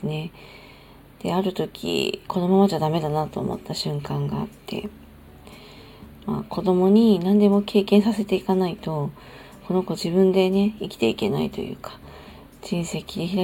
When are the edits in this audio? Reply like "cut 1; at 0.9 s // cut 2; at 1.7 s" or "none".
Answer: none